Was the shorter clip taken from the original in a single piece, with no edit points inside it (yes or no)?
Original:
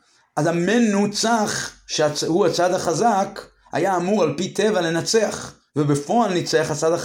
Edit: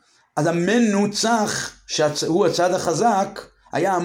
yes